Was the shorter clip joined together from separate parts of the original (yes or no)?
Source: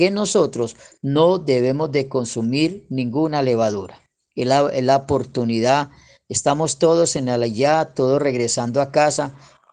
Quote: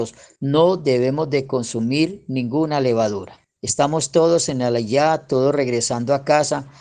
yes